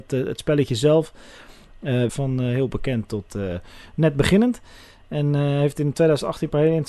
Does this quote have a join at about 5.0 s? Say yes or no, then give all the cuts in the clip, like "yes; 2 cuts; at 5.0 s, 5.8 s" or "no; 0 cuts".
no; 1 cut; at 2.1 s